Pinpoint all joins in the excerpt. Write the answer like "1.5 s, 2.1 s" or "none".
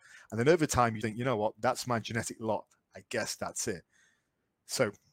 1.0 s